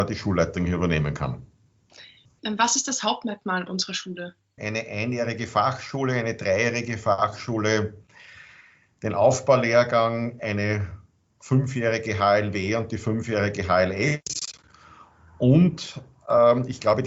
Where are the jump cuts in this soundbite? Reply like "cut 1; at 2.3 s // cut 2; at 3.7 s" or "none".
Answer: cut 1; at 4.6 s